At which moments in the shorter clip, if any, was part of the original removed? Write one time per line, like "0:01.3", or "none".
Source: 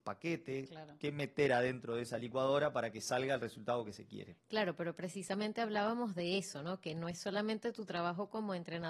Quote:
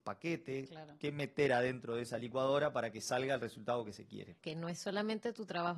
0:04.4